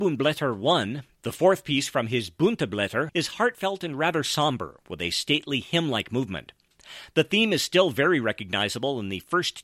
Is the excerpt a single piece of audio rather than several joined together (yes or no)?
no